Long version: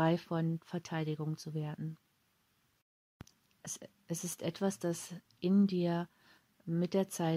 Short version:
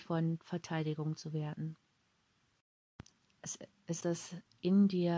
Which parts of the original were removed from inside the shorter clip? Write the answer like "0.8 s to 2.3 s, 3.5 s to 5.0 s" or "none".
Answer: 4.2 s to 4.8 s